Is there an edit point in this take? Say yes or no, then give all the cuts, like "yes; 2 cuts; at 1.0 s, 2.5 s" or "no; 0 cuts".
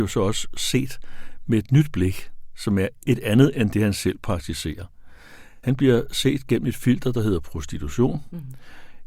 no; 0 cuts